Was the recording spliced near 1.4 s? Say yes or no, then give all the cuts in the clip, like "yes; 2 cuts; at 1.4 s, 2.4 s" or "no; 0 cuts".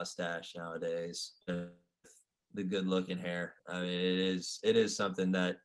yes; 2 cuts; at 1.4 s, 3.6 s